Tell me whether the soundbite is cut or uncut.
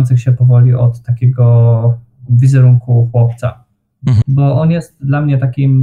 cut